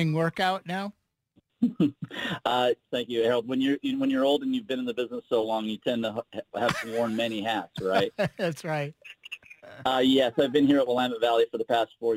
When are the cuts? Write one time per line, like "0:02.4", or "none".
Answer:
0:02.9